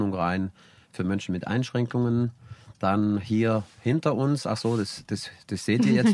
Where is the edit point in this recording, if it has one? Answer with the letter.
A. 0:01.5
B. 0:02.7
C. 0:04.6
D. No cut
D